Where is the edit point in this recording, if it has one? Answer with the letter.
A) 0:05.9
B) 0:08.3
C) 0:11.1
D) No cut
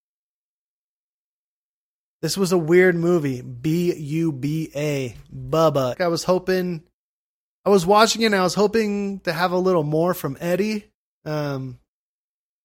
A